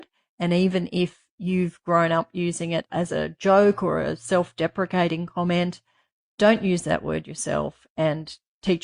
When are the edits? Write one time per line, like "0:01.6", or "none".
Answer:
none